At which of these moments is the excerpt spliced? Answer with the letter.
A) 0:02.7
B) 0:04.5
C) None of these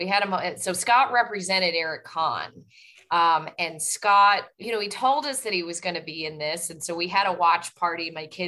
B